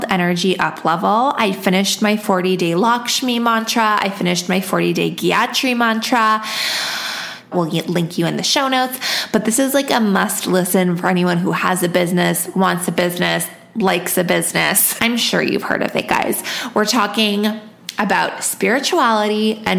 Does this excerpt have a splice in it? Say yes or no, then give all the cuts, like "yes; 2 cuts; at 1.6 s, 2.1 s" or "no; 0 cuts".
yes; 2 cuts; at 7.5 s, 15.0 s